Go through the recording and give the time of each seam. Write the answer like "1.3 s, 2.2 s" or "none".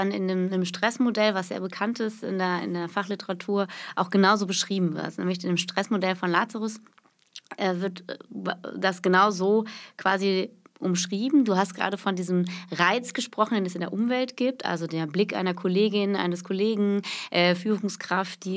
none